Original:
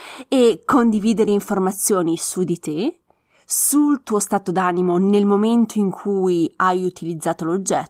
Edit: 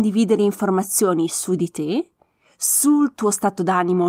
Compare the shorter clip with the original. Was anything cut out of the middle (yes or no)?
no